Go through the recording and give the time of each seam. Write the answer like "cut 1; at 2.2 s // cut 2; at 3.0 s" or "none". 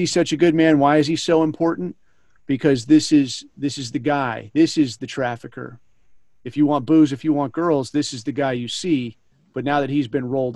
none